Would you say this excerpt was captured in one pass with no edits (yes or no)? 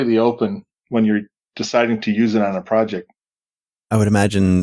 yes